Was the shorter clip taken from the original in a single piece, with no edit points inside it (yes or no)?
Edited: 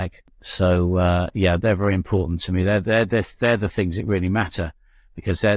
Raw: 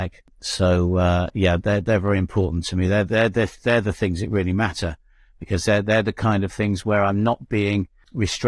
no